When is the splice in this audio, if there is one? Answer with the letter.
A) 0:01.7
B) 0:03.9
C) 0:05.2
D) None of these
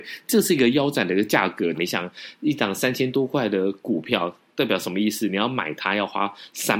A